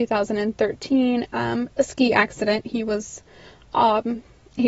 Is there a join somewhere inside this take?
yes; 1 cut; at 1.3 s

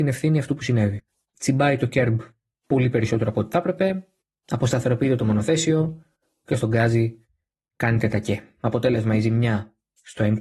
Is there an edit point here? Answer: yes; 1 cut; at 1.3 s

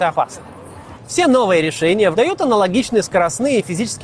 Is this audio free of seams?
no; 2 cuts; at 0.9 s, 2.1 s

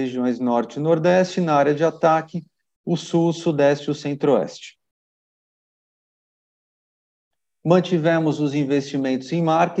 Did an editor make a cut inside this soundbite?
no; 0 cuts

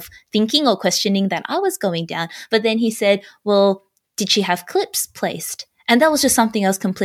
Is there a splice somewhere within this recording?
no; 0 cuts

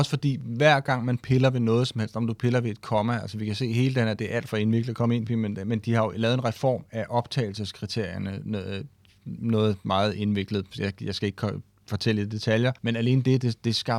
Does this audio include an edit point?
yes; 1 cut; at 12.8 s

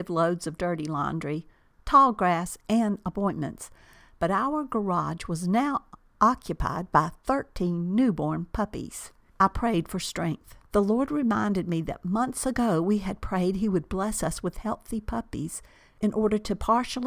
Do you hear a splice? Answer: yes; 2 cuts; at 9.3 s, 10.6 s

